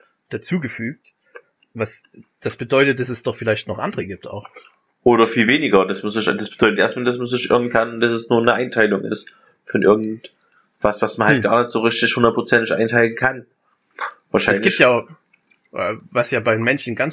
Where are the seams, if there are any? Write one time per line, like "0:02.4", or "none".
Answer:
none